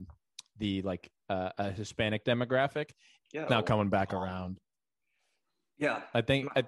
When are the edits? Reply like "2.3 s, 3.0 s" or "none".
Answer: 3.5 s